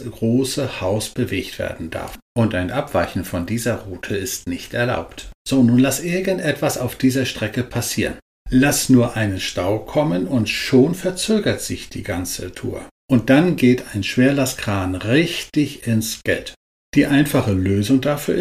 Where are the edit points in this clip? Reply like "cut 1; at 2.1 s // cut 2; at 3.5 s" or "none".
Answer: cut 1; at 13.0 s